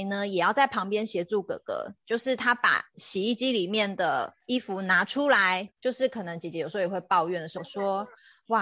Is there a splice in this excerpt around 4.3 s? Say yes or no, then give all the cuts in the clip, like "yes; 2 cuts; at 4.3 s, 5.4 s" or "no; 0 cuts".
no; 2 cuts; at 5.8 s, 7.6 s